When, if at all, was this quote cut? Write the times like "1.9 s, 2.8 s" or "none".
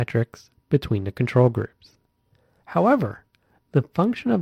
2.6 s

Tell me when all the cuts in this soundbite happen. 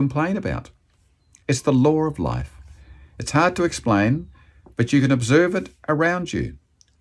none

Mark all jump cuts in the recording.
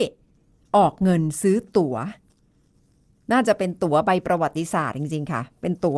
none

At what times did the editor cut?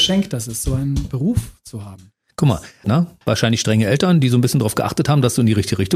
2.8 s

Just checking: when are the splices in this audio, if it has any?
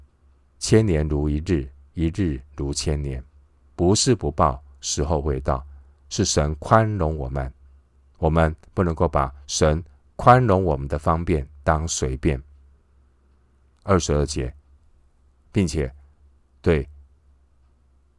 13.8 s

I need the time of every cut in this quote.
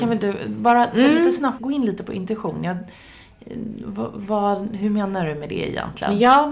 1.6 s

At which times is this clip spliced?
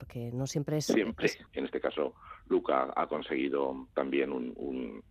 1.5 s

